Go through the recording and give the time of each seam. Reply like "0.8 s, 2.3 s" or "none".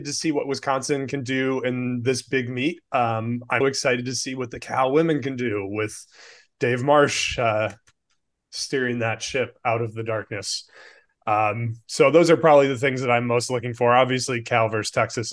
3.6 s